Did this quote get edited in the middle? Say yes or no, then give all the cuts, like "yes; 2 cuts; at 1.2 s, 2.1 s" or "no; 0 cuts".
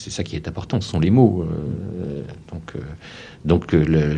no; 0 cuts